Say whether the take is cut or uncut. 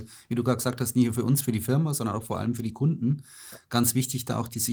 uncut